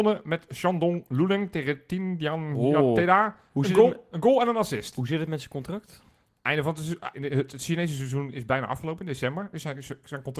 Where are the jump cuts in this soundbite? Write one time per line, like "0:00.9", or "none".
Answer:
0:07.1

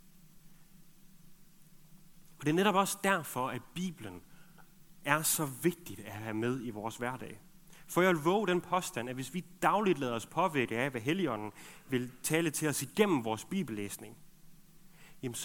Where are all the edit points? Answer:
none

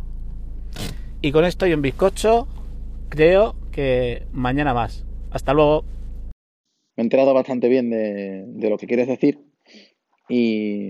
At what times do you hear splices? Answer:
0:06.9

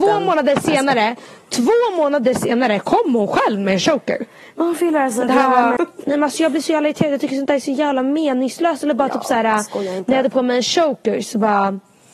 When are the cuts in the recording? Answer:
0:05.8

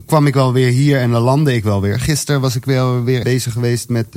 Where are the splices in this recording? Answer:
0:03.2

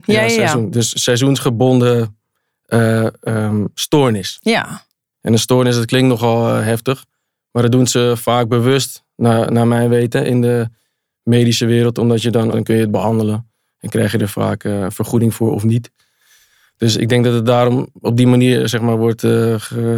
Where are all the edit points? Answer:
0:12.5

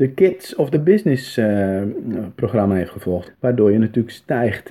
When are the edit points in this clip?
0:03.3

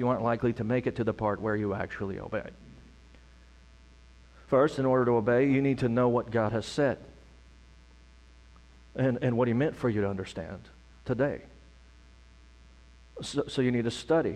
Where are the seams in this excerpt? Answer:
none

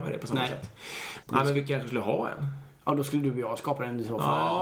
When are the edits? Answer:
0:01.2

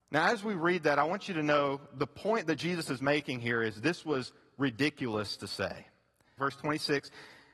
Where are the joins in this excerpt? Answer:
0:06.4

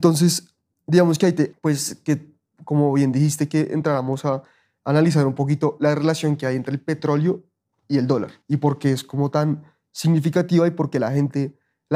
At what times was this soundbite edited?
0:01.5
0:08.4

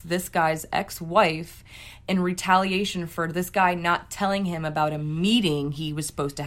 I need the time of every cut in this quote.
none

